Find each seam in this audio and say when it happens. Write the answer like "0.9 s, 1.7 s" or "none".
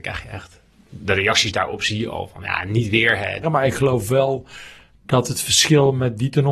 3.4 s